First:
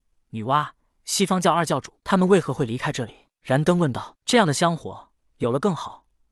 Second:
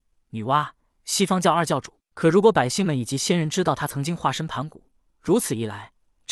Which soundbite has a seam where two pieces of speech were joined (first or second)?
first